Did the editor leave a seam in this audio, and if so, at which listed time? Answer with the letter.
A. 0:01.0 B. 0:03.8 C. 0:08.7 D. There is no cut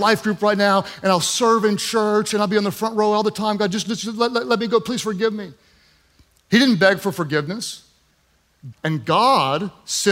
C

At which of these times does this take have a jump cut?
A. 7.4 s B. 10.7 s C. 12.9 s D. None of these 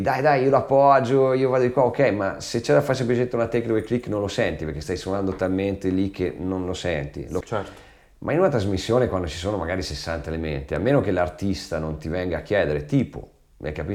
A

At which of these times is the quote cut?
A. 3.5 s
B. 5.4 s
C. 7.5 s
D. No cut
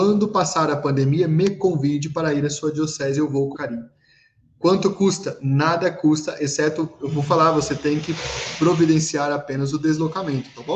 A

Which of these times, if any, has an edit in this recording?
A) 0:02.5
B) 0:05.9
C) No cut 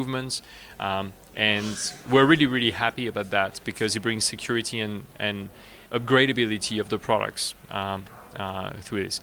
B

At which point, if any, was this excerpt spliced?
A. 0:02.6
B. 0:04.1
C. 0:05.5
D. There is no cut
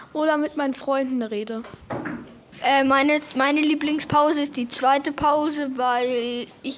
D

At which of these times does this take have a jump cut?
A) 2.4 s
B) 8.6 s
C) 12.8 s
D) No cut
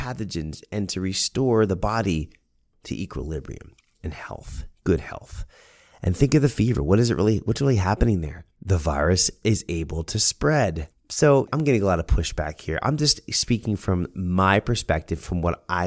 B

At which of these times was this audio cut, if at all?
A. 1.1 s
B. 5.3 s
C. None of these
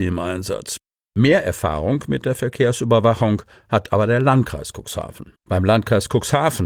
B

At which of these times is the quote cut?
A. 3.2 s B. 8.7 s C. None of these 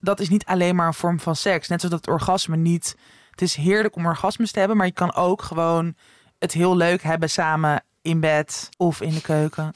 B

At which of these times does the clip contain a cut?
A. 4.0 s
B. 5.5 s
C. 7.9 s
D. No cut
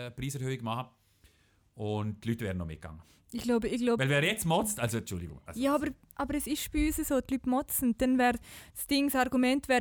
D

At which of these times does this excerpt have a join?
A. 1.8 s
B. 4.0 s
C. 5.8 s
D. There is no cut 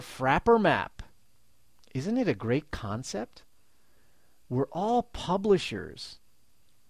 A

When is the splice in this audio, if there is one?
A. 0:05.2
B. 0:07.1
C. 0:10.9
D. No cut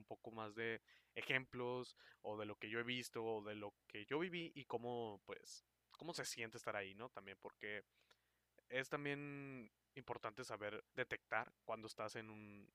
C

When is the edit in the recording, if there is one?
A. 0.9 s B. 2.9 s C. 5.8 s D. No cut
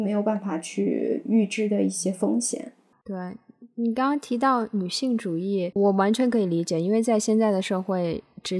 C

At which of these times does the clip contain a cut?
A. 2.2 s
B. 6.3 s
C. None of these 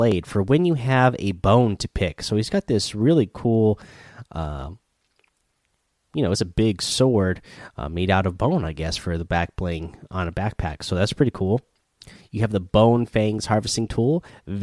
C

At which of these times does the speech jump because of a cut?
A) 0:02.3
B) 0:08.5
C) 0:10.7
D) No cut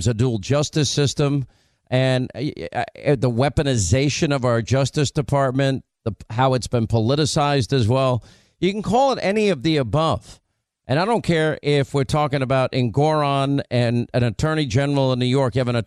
D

